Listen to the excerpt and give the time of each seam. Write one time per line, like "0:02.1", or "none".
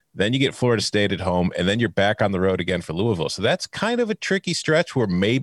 none